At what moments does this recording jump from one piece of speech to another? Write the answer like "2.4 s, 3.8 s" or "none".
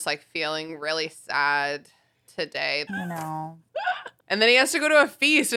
2.9 s, 4.2 s